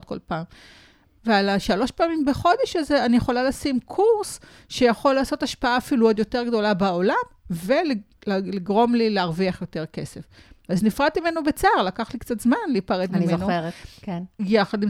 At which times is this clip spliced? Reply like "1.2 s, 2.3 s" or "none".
1.2 s